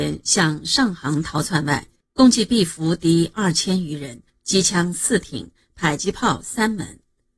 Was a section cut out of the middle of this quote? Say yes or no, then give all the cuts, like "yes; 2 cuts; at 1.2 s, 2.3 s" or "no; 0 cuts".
yes; 2 cuts; at 2.0 s, 4.3 s